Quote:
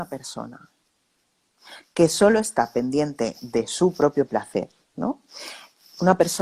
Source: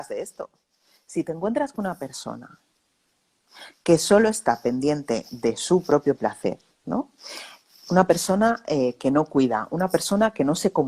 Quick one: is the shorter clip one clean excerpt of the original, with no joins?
yes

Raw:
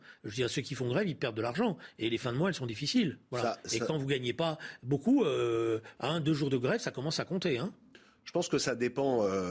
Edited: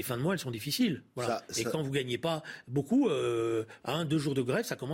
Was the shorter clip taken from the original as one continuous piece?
yes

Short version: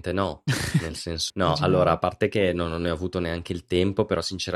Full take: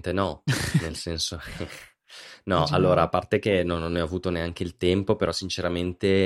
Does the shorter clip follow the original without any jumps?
no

